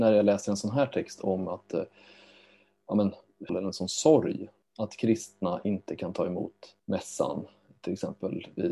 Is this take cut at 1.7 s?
no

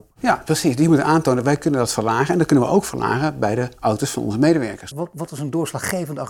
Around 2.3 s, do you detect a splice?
no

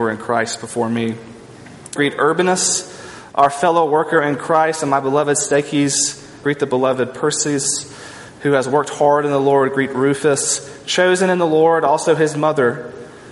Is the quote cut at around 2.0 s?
yes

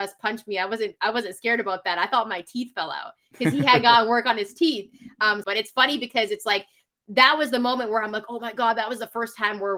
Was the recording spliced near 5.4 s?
yes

